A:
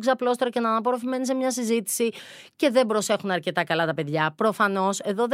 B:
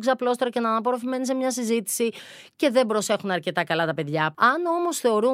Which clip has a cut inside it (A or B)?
B